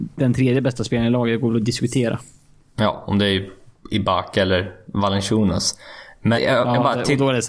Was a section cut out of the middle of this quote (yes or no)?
yes